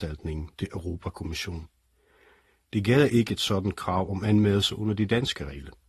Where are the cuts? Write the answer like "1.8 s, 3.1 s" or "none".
none